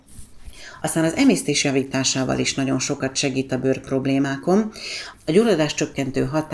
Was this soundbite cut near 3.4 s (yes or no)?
no